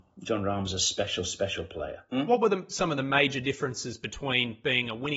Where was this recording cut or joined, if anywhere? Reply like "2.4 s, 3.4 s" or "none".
2.1 s